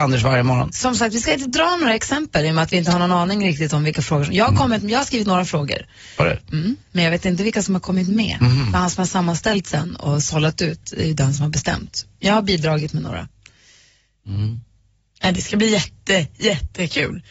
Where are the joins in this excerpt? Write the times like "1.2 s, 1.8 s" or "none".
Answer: none